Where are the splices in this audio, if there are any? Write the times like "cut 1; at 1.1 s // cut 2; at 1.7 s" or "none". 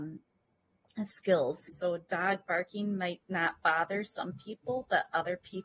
cut 1; at 1.7 s